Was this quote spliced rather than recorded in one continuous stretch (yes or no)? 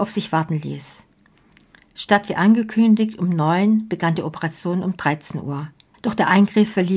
yes